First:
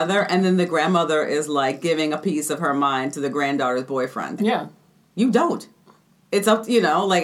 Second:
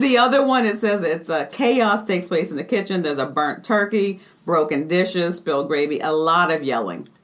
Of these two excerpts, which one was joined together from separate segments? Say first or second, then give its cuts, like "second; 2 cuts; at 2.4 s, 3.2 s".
first; 1 cut; at 4.4 s